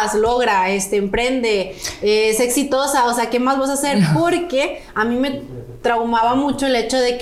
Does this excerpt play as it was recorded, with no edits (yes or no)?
yes